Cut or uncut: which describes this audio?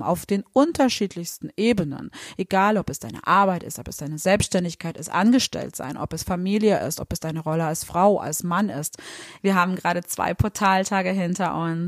cut